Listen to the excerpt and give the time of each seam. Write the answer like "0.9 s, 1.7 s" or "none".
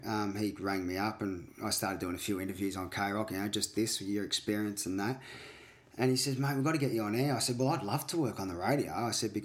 3.7 s